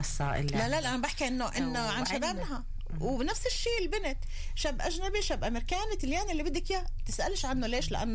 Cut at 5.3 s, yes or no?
no